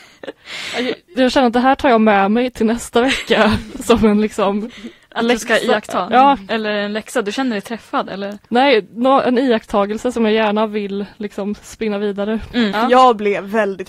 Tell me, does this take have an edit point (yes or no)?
yes